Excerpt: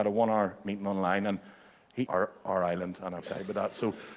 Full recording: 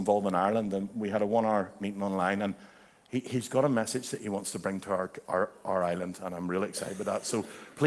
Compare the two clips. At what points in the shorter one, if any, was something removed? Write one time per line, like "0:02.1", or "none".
0:02.1
0:03.2